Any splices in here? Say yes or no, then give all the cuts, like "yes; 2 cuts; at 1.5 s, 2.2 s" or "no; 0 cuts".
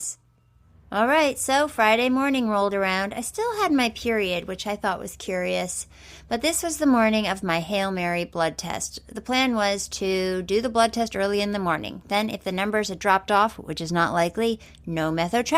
no; 0 cuts